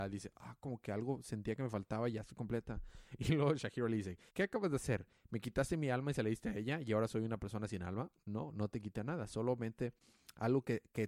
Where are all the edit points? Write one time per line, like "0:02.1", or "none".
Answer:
0:04.3